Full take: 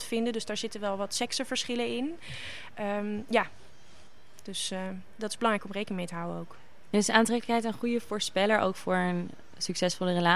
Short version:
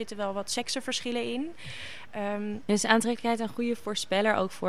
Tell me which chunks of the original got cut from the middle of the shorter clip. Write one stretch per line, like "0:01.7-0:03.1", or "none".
0:03.3-0:06.9